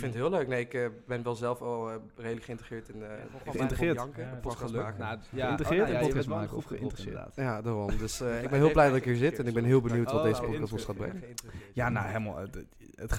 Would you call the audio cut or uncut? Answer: uncut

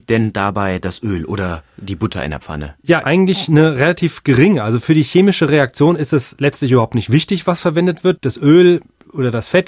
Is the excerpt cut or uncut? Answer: cut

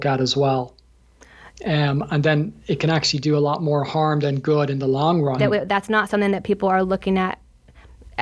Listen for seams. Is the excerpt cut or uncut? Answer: cut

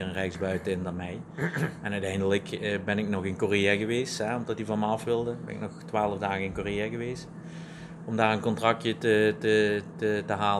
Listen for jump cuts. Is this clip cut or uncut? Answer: uncut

